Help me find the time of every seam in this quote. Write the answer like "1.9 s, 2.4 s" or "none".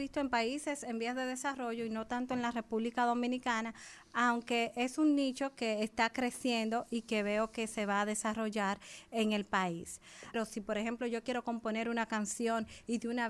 10.3 s

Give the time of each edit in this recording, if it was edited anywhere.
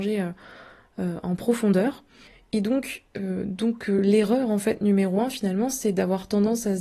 none

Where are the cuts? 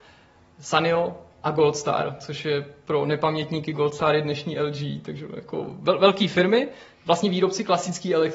none

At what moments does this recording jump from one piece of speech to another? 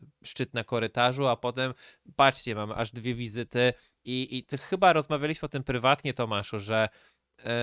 4.0 s

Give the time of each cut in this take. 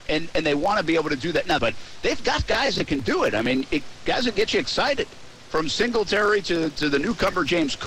1.6 s

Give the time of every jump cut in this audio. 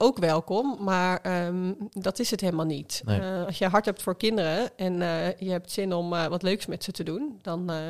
none

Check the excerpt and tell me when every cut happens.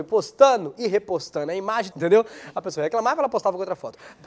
1.9 s

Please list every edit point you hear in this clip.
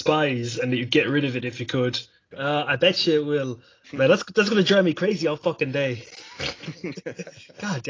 2.3 s, 3.8 s

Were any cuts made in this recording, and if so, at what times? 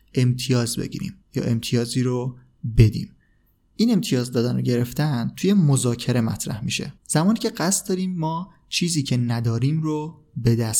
1.2 s, 7.0 s

